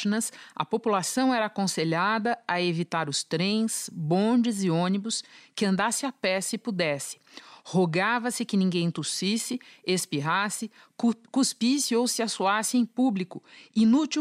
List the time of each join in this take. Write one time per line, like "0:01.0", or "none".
none